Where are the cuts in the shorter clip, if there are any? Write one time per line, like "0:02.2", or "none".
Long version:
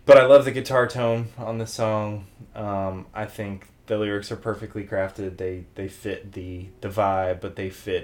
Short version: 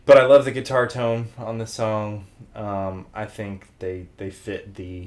0:03.8